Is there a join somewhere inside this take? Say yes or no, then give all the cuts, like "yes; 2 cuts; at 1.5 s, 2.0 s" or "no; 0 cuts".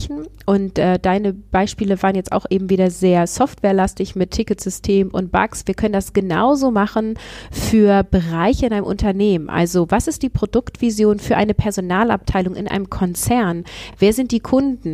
no; 0 cuts